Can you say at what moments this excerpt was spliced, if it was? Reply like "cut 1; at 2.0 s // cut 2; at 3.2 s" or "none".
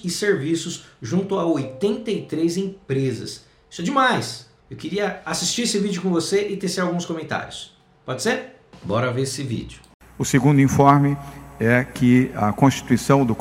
none

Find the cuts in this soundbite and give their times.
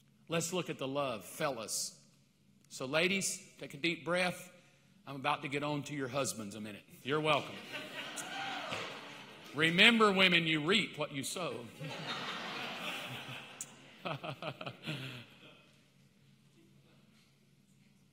cut 1; at 7.0 s

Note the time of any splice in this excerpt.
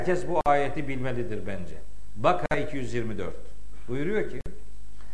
none

